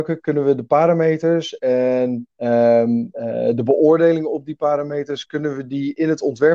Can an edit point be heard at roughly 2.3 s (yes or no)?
yes